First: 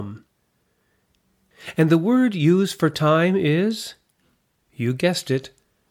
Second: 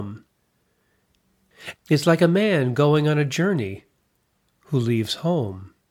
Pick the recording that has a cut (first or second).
second